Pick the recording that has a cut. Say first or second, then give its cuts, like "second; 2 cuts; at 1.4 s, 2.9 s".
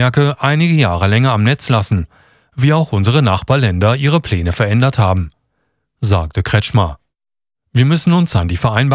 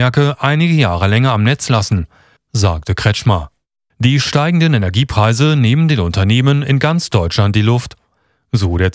second; 2 cuts; at 2.4 s, 3.9 s